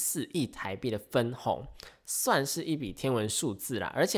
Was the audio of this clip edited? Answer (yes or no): no